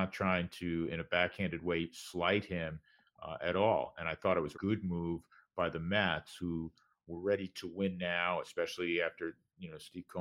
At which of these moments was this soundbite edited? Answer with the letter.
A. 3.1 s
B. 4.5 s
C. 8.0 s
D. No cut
B